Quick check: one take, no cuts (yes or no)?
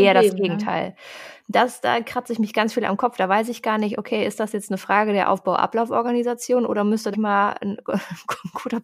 no